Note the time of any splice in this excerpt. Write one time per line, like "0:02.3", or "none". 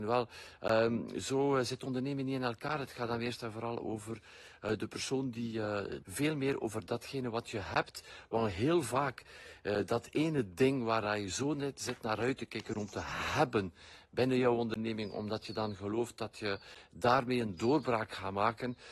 0:06.0